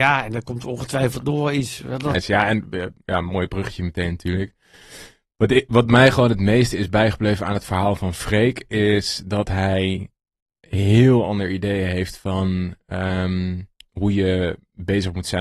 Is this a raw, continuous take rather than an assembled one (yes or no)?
no